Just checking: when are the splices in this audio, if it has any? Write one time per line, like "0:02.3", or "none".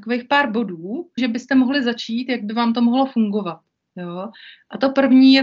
0:01.2